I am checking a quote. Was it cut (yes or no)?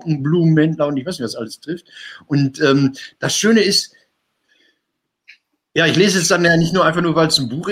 no